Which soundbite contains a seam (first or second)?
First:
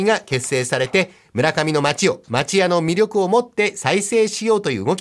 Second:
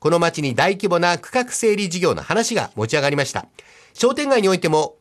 second